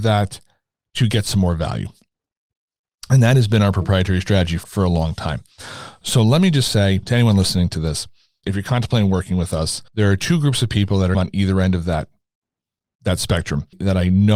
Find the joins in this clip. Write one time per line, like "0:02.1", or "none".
0:08.4
0:09.9